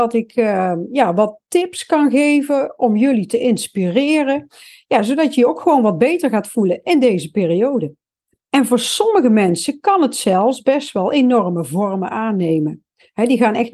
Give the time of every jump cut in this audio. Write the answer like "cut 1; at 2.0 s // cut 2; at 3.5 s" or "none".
cut 1; at 8.3 s